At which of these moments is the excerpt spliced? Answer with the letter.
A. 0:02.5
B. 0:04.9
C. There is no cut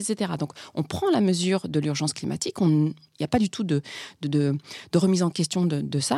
C